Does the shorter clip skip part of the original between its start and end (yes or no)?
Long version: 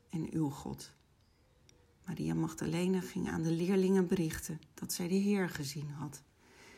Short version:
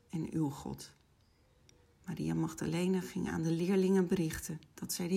no